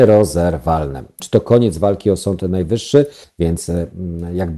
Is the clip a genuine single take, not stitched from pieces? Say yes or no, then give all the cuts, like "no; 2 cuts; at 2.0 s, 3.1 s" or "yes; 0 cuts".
no; 2 cuts; at 1.2 s, 3.2 s